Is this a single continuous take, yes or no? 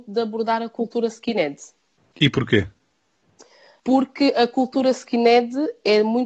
yes